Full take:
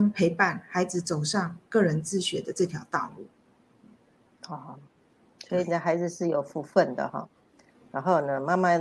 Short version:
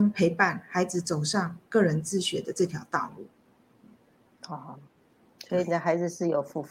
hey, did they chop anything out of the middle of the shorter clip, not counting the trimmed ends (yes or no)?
no